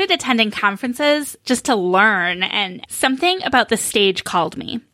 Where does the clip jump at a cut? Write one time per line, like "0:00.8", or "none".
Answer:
0:02.8

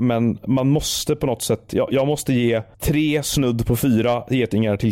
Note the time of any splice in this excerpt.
0:02.7

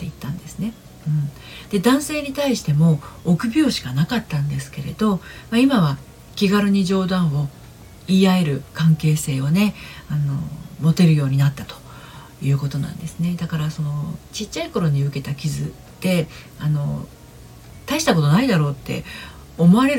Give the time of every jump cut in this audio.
none

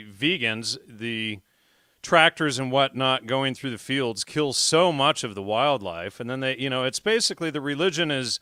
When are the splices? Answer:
none

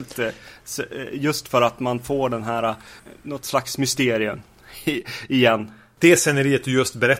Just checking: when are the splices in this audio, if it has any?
none

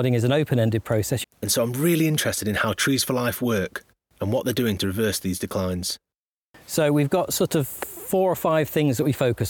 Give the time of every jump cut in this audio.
0:01.2

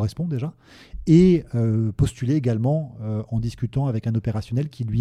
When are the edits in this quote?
none

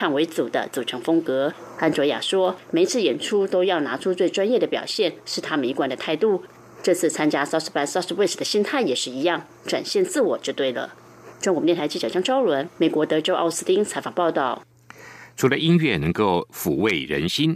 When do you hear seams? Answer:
none

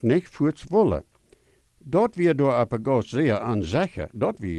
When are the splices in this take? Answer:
0:01.6

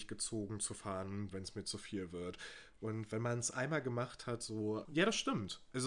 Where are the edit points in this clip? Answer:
0:04.9

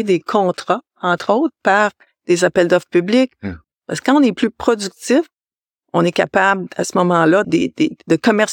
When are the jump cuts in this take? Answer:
0:03.6
0:07.4

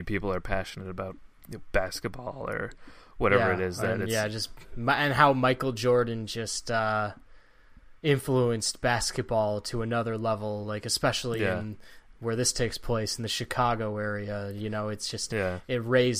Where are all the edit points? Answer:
0:08.0

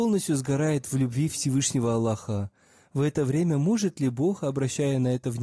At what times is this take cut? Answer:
none

